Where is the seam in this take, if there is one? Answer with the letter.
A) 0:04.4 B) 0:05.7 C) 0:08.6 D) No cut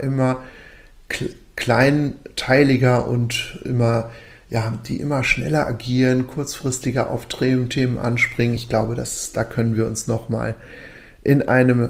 D